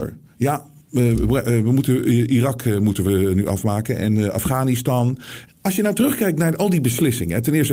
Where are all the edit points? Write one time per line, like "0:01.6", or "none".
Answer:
0:05.5